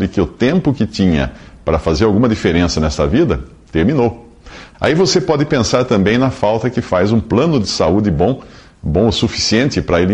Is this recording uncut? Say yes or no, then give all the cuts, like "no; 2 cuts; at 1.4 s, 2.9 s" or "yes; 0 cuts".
no; 1 cut; at 4.7 s